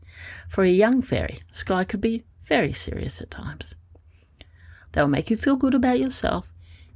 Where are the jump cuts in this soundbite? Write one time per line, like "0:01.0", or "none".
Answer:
0:04.8